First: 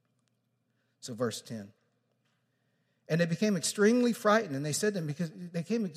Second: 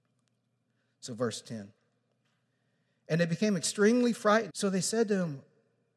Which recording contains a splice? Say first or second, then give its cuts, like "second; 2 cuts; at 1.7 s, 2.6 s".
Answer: second; 1 cut; at 4.5 s